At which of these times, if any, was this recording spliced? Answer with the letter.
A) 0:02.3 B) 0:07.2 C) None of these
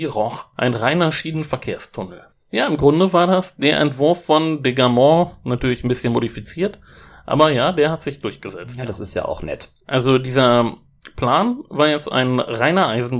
A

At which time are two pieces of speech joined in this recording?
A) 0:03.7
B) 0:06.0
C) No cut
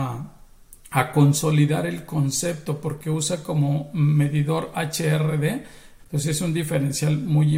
B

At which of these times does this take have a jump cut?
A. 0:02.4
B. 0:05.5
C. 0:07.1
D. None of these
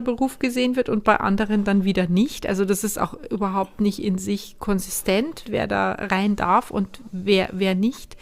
B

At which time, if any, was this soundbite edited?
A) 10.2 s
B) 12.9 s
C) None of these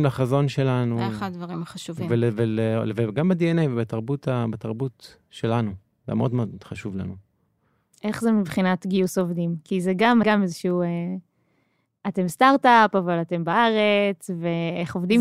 A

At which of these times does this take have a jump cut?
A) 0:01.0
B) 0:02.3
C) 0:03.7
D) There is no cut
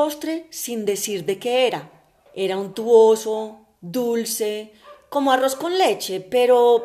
B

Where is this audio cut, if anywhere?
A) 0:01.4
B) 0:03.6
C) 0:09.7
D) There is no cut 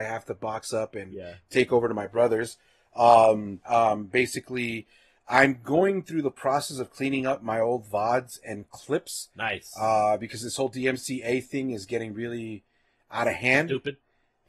B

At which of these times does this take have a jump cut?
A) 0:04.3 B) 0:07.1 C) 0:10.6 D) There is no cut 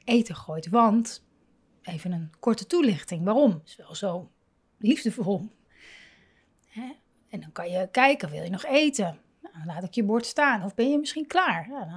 D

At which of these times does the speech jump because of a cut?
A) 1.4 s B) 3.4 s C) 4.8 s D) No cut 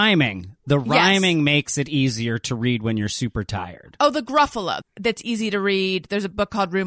C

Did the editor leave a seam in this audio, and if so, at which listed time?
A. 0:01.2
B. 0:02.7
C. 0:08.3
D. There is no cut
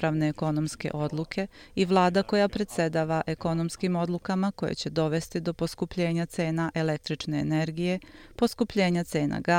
D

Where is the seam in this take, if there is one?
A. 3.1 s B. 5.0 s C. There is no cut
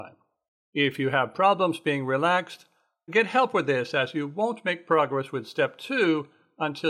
A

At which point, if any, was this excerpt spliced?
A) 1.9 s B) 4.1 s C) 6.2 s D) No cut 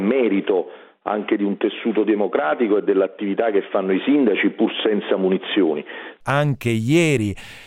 C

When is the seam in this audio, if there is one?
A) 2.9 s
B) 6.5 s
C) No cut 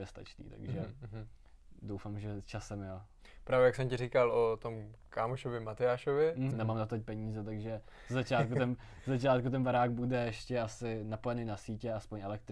B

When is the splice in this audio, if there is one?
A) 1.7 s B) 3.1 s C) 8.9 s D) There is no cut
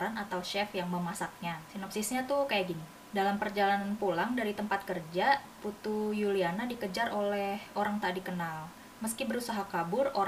D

